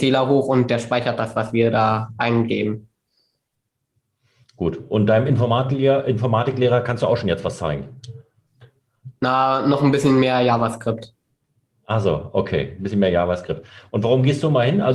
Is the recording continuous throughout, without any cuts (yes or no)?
no